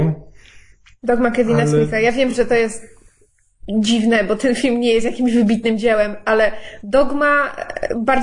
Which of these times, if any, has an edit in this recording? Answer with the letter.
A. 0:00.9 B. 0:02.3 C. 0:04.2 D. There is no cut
D